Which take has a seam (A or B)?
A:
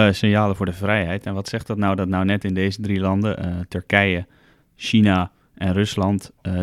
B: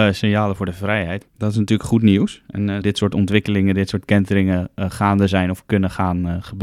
B